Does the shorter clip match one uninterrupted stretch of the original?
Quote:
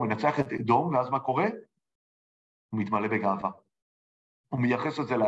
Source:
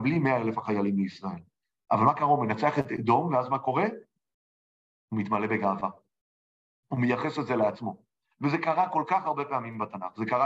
yes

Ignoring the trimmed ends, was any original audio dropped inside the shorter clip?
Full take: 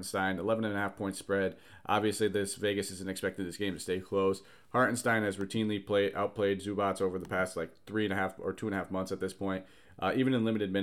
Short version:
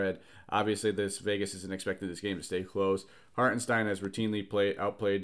no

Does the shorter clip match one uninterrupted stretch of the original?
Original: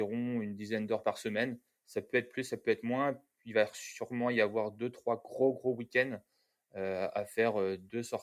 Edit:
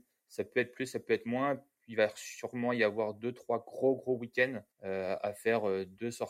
no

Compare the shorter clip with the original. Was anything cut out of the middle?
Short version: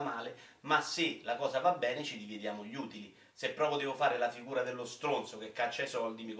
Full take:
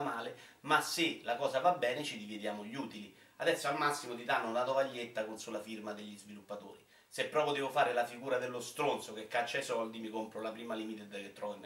yes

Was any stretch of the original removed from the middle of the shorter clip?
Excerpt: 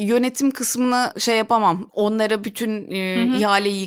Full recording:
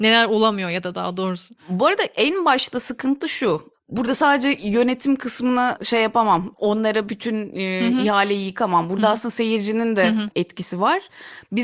no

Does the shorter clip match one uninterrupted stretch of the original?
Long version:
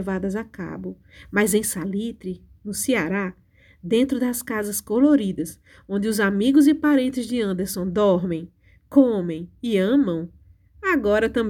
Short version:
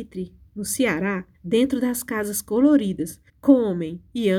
no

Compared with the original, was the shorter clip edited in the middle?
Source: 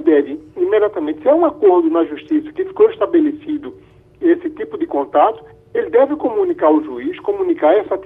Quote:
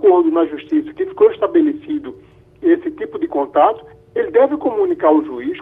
no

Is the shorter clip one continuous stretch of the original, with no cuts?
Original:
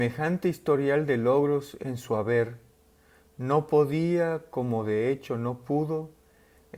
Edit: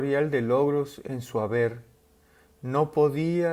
yes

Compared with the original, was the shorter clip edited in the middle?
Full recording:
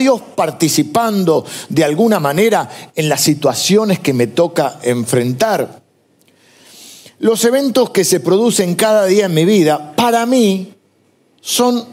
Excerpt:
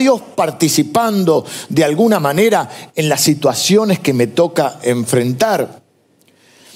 no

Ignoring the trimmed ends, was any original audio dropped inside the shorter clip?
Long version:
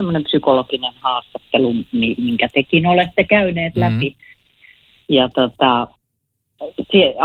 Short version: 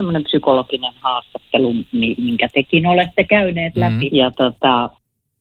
yes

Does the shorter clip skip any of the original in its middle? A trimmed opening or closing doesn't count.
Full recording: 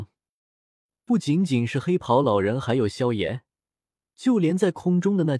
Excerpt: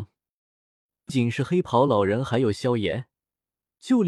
yes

